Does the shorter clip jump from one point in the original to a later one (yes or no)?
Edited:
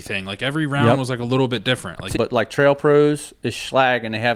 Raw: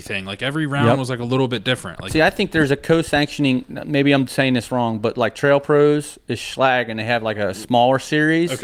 yes